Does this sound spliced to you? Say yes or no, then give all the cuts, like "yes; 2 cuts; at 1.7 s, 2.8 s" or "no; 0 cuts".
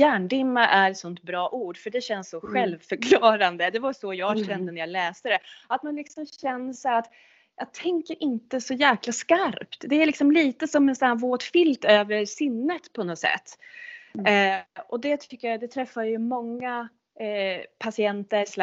no; 0 cuts